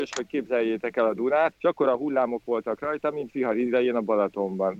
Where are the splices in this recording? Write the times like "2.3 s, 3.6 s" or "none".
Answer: 1.5 s